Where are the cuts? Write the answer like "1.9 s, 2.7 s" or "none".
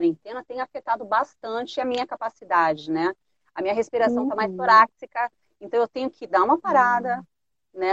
none